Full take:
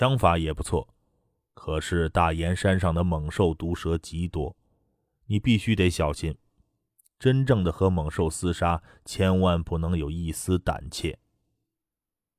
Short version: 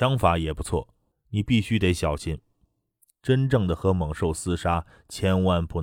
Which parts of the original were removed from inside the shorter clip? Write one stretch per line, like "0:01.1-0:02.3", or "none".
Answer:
0:01.1-0:05.1